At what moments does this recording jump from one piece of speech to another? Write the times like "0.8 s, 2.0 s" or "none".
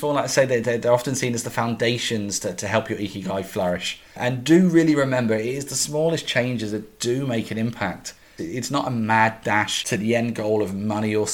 8.4 s